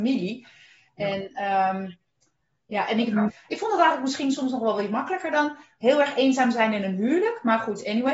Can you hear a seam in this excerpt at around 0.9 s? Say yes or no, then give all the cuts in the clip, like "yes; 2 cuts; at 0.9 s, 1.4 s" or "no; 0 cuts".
no; 1 cut; at 3.3 s